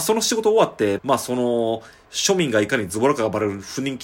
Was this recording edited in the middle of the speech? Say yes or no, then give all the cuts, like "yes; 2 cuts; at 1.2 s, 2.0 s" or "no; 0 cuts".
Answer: yes; 1 cut; at 1.0 s